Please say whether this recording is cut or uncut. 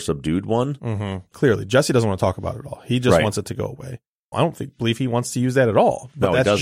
cut